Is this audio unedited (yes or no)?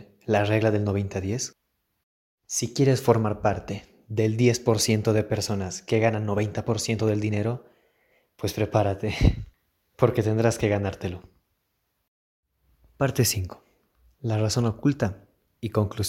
yes